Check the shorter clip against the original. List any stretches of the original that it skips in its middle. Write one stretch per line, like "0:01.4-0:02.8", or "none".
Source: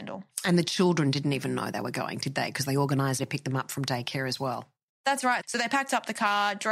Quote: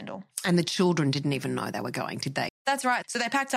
0:02.5-0:04.9